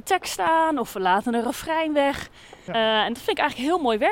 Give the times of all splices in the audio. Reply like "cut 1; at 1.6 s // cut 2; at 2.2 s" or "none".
cut 1; at 2.7 s